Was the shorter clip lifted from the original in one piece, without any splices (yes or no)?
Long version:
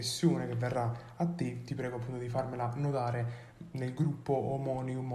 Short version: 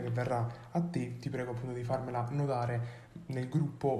yes